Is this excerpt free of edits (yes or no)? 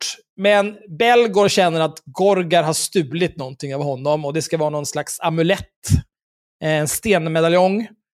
yes